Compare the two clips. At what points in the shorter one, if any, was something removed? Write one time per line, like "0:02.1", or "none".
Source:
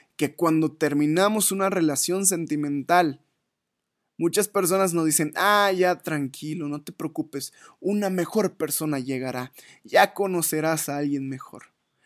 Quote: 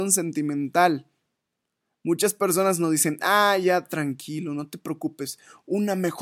none